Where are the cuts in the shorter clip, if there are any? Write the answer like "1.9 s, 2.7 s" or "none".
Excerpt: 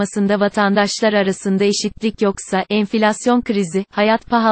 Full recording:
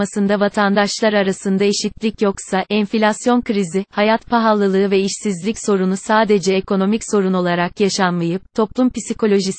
none

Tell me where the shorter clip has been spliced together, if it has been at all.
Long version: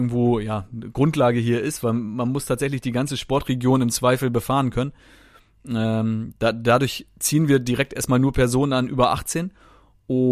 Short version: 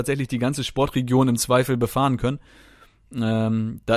none

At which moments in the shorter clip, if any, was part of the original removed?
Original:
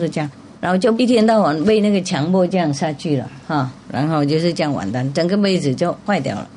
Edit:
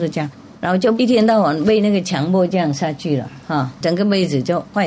3.8 s

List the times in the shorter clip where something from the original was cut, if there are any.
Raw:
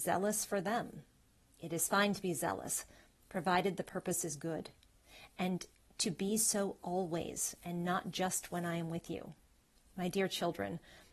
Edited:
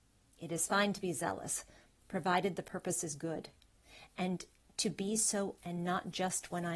5.6 s

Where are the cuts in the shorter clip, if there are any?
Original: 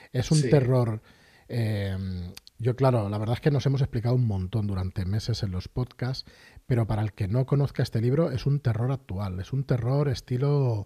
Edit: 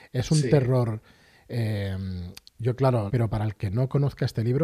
3.1 s

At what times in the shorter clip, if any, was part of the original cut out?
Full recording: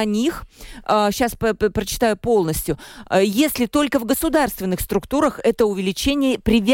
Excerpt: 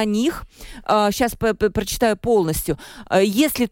none

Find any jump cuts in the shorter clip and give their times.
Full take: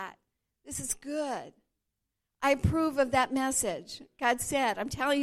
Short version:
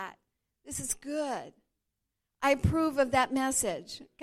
none

